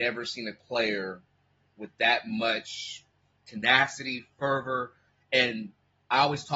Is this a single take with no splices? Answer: yes; 0 cuts

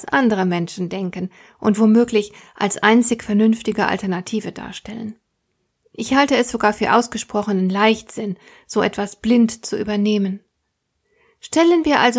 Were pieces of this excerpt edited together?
no; 0 cuts

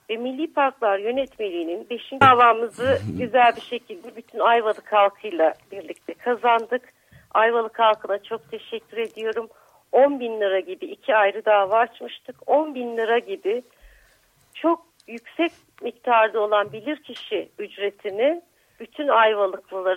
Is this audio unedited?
no; 1 cut; at 2.2 s

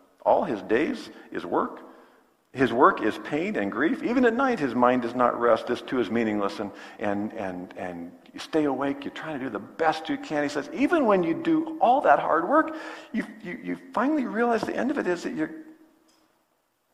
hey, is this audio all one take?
no; 1 cut; at 7.0 s

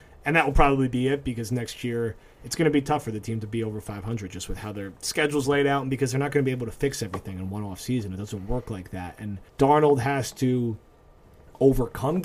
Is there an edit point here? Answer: yes; 1 cut; at 9.5 s

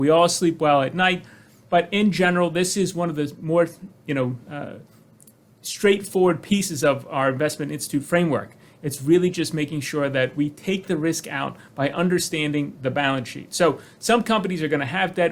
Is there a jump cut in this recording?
no; 0 cuts

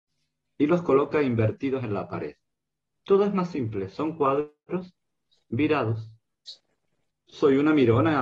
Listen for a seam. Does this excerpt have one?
yes; 2 cuts; at 2.9 s, 7.1 s

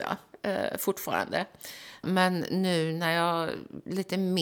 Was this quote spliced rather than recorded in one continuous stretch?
yes; 1 cut; at 2.0 s

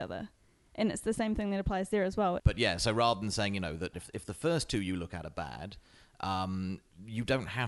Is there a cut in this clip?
yes; 2 cuts; at 2.4 s, 3.9 s

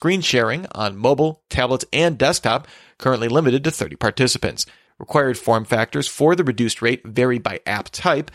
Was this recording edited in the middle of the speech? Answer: yes; 1 cut; at 4.9 s

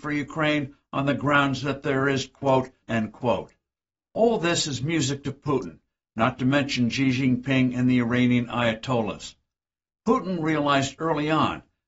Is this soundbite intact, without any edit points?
no; 1 cut; at 2.8 s

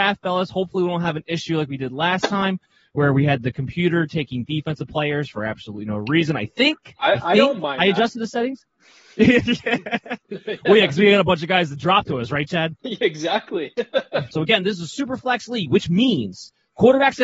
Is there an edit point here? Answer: yes; 2 cuts; at 12.8 s, 14.3 s

